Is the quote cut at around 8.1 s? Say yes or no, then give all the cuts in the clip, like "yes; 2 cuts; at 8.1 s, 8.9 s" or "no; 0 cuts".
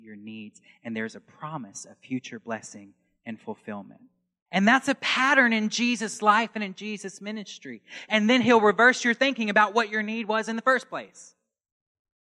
yes; 2 cuts; at 4.5 s, 8.1 s